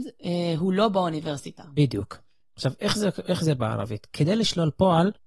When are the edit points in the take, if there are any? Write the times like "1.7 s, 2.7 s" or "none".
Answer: none